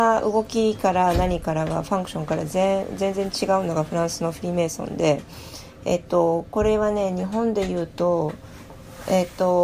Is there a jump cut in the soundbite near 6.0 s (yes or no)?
no